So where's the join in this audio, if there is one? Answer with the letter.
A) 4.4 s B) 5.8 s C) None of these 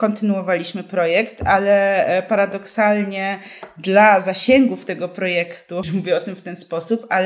B